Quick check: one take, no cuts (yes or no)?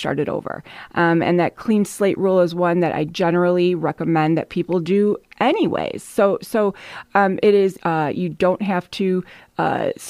no